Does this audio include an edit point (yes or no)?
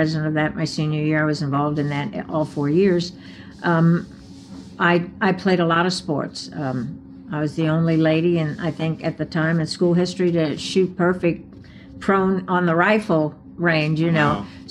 no